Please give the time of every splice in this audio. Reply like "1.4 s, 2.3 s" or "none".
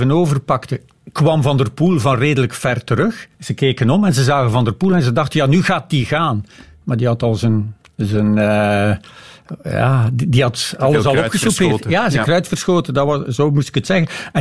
3.3 s

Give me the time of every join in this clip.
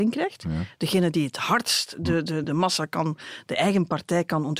2.4 s

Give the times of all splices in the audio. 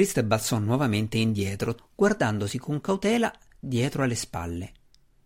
1.8 s

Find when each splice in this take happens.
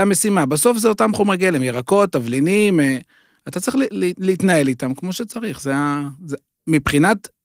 none

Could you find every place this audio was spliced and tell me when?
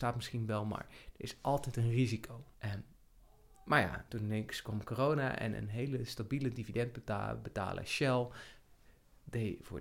2.5 s, 4.1 s

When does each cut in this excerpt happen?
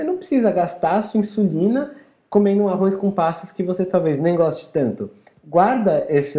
none

